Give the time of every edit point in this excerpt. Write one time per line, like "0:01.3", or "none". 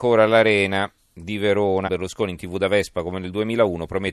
0:01.8